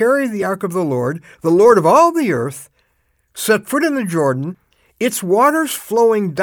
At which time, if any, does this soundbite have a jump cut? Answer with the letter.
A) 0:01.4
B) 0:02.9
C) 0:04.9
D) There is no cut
D